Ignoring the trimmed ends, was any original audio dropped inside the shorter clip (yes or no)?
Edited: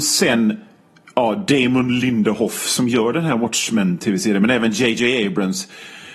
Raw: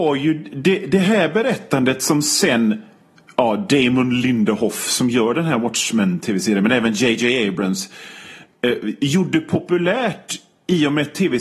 no